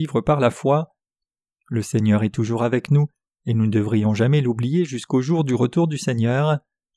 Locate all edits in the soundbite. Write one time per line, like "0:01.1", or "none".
0:03.3